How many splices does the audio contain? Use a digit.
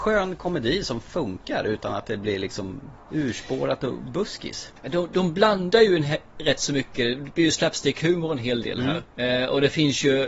0